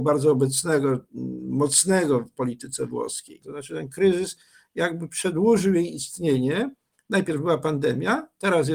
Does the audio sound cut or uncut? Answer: cut